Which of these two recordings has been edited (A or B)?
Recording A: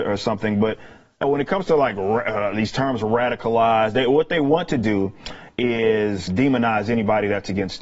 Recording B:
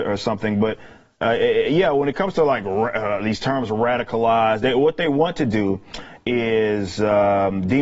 A